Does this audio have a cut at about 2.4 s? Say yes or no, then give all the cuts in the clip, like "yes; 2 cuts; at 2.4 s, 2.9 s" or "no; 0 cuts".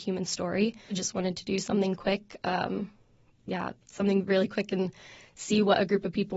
no; 1 cut; at 0.9 s